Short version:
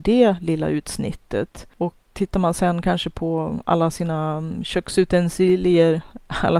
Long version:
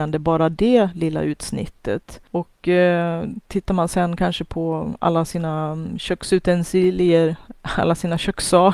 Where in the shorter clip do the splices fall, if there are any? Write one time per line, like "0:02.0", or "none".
0:02.1